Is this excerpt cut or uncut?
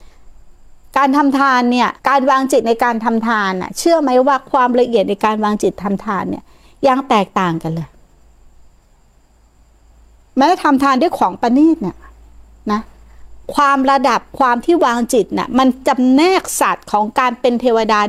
cut